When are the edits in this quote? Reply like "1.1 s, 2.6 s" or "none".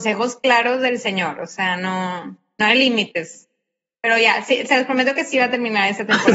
none

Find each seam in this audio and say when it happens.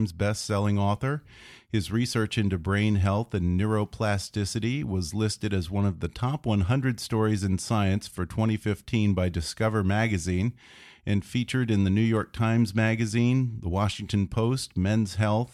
none

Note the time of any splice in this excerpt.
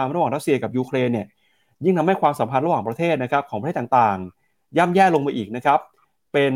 none

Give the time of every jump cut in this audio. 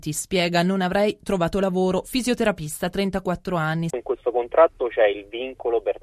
3.9 s

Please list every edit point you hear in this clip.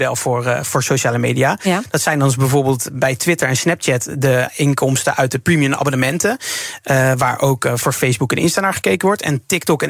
none

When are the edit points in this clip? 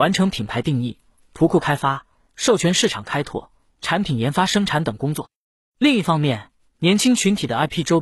none

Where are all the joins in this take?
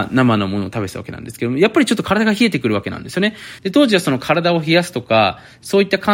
3.6 s

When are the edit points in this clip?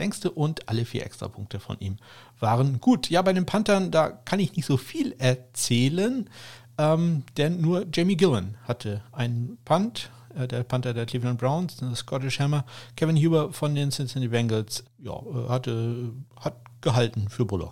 14.8 s, 16.3 s

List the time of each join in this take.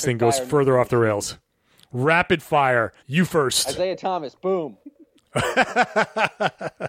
3.0 s, 4.8 s

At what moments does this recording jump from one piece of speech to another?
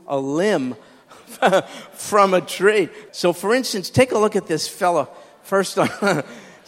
3.1 s

